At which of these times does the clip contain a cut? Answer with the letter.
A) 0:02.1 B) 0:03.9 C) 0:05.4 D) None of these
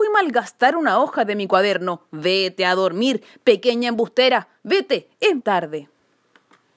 C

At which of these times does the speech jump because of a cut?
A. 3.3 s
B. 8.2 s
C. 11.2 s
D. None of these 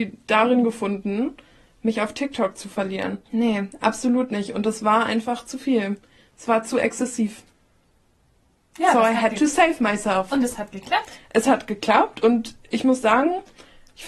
A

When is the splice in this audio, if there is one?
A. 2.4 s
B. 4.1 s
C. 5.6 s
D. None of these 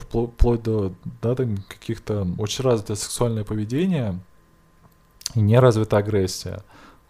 A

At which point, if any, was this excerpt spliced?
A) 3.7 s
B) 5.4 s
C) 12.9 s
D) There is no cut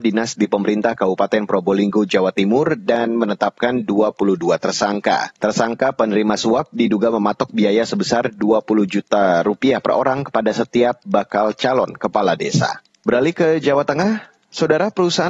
B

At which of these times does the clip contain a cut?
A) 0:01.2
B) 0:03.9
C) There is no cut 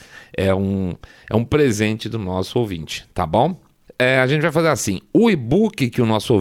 B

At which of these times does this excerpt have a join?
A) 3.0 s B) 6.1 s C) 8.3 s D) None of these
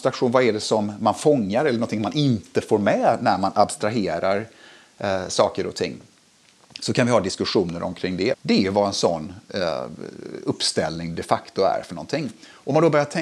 C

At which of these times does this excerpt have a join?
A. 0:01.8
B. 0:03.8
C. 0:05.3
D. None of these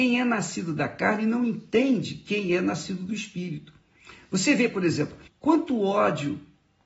C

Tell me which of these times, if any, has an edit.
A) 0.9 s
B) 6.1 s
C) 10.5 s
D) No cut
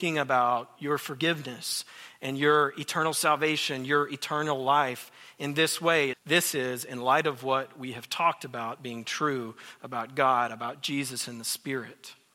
B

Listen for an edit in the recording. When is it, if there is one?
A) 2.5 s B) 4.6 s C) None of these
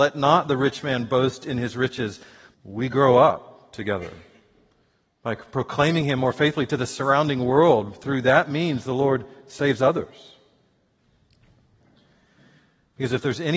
A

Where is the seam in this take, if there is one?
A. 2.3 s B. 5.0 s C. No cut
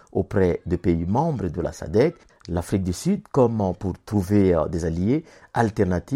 A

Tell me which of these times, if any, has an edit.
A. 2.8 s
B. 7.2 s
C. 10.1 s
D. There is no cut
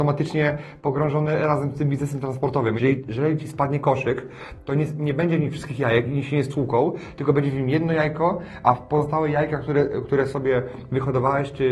A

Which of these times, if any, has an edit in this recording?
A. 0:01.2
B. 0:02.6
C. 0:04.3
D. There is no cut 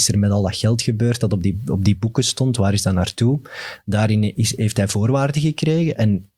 C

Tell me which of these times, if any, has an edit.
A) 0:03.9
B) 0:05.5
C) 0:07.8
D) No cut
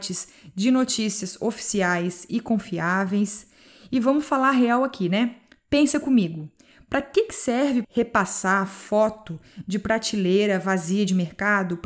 C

